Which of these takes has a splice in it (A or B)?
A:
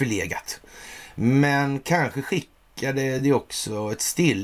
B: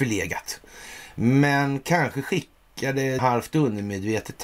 B